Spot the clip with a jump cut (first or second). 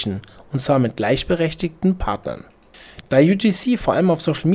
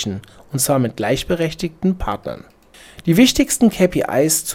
first